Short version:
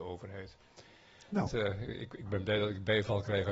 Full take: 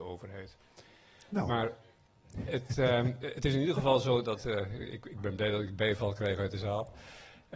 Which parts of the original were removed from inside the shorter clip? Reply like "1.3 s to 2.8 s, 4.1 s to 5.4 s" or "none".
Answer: 1.5 s to 4.4 s